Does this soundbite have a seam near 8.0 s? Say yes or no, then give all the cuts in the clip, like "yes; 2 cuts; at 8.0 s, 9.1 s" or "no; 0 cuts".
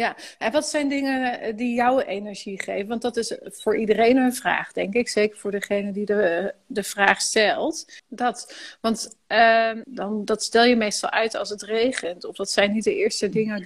yes; 2 cuts; at 8.0 s, 9.8 s